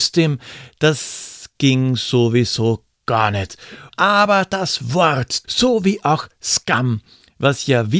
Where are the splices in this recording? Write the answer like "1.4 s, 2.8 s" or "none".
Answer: 3.9 s, 5.4 s